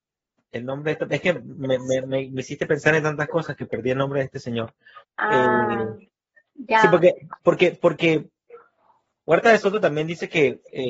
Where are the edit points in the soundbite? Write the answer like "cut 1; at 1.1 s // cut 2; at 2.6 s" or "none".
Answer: cut 1; at 5.0 s